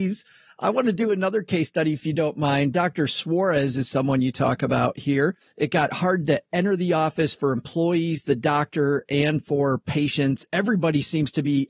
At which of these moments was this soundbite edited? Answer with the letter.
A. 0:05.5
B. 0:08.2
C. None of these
A